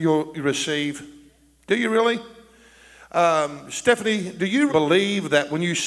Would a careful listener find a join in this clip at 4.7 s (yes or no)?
yes